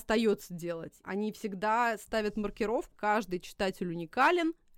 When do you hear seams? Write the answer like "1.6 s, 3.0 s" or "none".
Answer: 1.0 s, 2.9 s